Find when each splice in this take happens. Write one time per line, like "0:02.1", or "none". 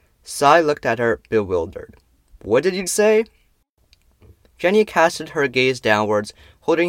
0:02.9